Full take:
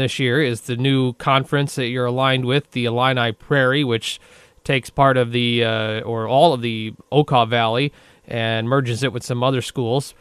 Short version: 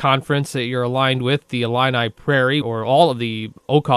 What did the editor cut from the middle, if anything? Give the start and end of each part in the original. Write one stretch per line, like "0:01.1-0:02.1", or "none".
0:03.8-0:06.0